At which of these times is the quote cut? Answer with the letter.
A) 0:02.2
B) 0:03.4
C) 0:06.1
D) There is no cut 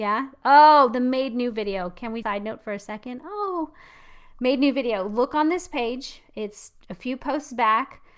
A